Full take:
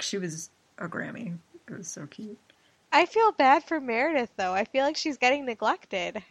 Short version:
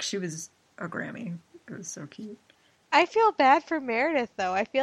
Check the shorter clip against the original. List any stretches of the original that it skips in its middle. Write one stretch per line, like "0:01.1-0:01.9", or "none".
none